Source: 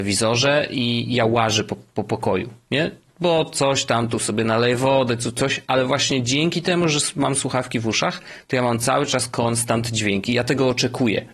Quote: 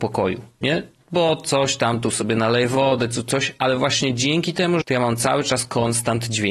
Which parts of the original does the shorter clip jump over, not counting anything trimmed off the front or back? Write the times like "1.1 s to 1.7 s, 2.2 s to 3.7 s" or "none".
6.9 s to 8.4 s